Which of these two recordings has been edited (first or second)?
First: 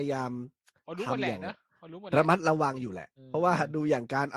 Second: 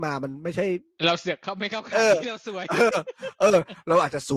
first